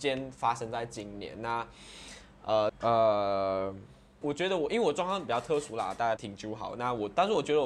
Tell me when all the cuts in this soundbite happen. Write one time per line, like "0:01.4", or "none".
0:02.7
0:04.2
0:06.2